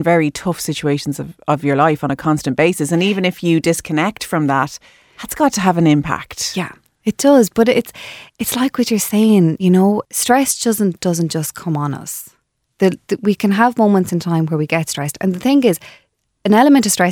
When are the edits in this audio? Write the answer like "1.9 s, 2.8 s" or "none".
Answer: none